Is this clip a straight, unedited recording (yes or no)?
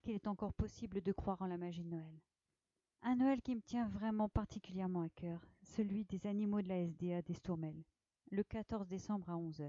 no